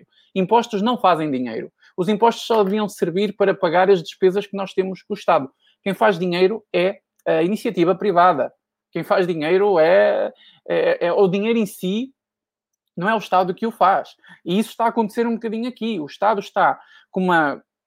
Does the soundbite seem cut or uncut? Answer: uncut